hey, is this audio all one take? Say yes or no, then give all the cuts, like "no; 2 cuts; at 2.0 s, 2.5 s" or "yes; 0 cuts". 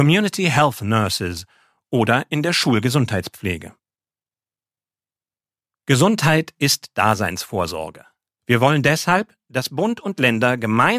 no; 2 cuts; at 5.7 s, 8.3 s